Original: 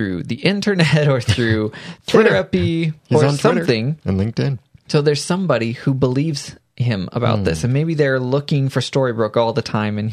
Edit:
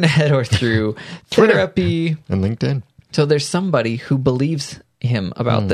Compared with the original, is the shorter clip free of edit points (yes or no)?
no